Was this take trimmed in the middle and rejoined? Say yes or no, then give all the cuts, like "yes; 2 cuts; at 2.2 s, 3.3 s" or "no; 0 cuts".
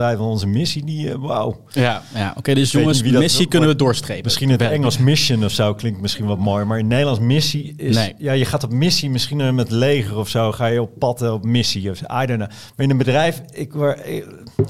no; 0 cuts